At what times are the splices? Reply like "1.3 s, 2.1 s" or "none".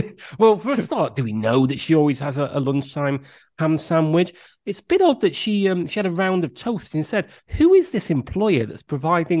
none